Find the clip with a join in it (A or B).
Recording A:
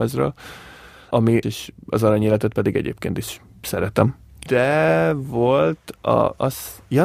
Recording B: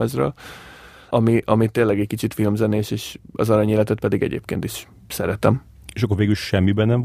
A